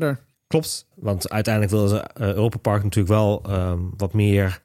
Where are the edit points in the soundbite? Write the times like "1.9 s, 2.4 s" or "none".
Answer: 0.9 s